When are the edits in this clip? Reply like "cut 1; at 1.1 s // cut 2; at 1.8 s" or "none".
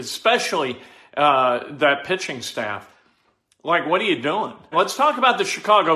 cut 1; at 4.7 s